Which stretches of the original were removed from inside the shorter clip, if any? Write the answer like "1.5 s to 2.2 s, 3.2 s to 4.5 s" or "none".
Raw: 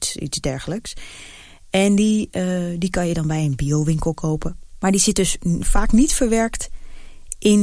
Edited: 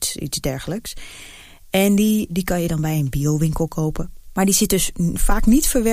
2.3 s to 2.8 s